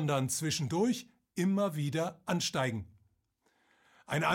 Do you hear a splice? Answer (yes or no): no